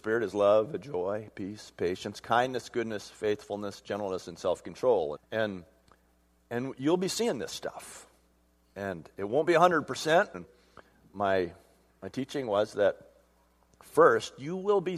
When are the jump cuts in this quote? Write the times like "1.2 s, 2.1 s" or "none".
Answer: 5.2 s, 10.3 s